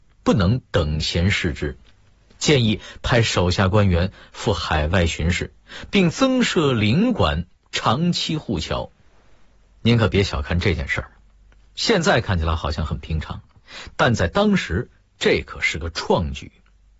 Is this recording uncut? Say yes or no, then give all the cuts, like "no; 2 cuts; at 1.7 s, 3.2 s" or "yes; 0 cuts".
yes; 0 cuts